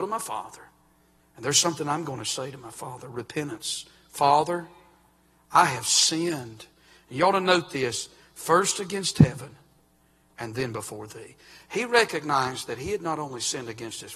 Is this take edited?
no; 0 cuts

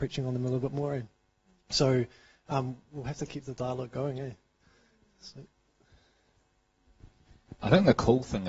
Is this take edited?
no; 0 cuts

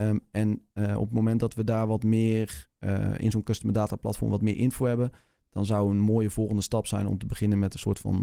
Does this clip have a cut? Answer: no; 0 cuts

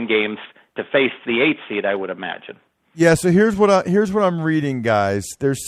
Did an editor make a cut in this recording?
no; 0 cuts

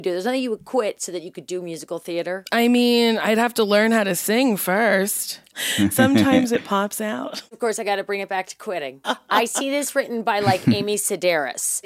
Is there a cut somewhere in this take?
yes; 2 cuts; at 5.5 s, 9.0 s

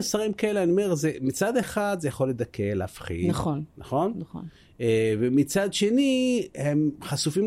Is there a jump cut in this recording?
no; 0 cuts

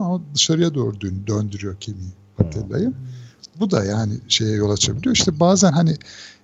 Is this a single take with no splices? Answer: yes; 0 cuts

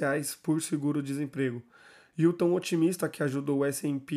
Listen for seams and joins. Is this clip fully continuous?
yes; 0 cuts

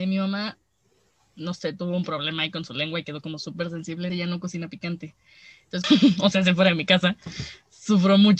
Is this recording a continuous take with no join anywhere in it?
no; 2 cuts; at 4.1 s, 5.8 s

